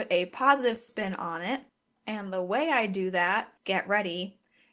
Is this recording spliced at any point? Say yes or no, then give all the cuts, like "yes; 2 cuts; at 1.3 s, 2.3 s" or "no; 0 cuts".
yes; 1 cut; at 3.6 s